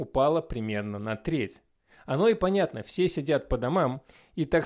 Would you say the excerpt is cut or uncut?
uncut